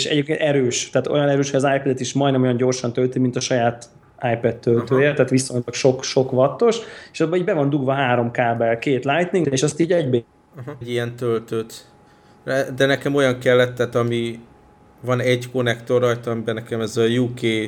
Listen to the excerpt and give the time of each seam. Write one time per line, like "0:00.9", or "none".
0:09.4
0:10.8

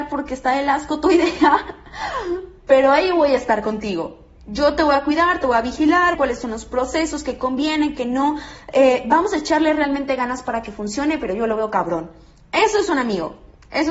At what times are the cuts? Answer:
0:06.1

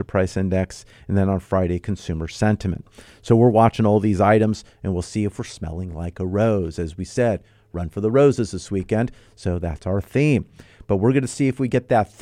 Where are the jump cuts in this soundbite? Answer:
none

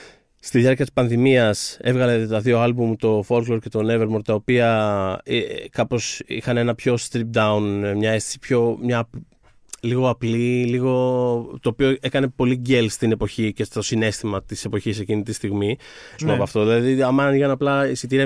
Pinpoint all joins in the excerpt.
0:16.2

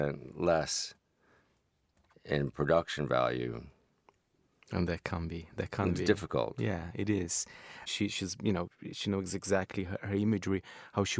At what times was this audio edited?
0:07.9

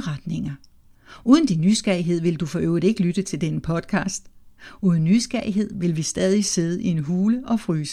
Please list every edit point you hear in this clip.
none

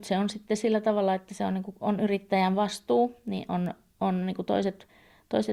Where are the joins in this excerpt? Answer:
none

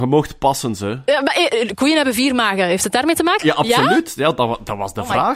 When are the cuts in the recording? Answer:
0:03.4

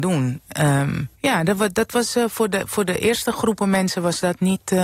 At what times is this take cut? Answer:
0:01.1

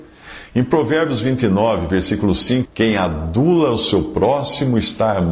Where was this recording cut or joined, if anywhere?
0:02.7

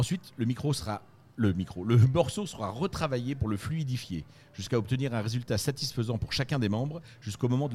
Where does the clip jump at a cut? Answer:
none

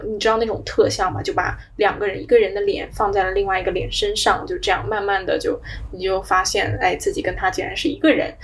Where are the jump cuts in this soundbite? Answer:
none

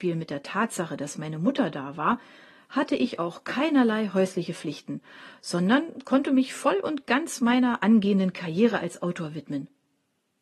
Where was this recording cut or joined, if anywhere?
none

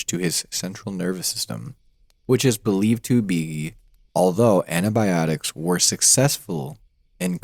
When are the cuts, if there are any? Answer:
0:04.1

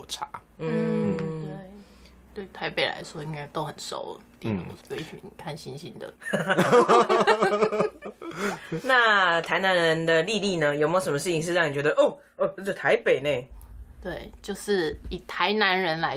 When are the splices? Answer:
0:04.8

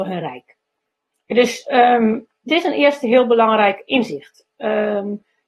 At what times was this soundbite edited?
none

